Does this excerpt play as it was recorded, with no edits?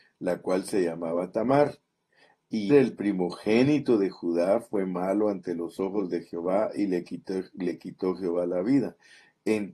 no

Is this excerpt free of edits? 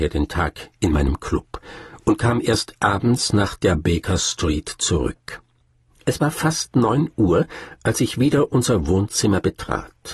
yes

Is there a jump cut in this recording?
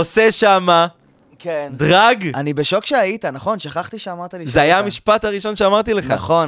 no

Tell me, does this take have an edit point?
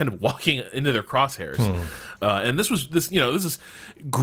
yes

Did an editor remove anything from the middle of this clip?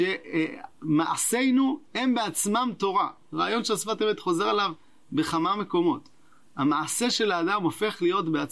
no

